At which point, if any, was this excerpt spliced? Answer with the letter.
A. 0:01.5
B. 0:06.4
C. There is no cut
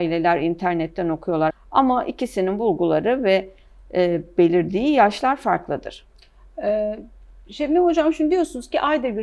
A